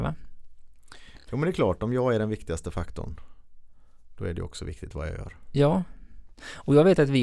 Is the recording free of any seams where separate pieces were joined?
yes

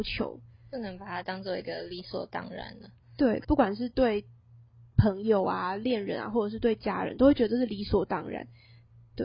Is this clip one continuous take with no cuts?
no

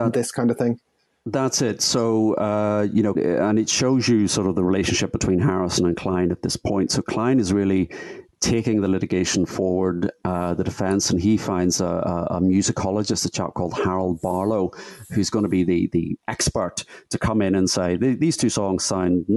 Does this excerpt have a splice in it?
yes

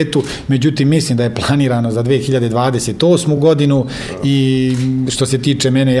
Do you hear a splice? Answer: no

